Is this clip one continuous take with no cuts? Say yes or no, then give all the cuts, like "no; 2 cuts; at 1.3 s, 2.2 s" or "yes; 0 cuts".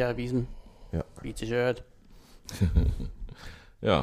yes; 0 cuts